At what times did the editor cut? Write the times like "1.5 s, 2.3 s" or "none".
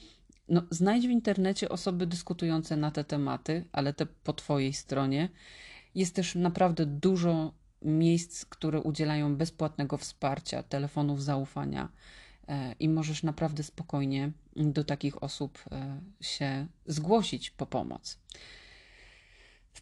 5.8 s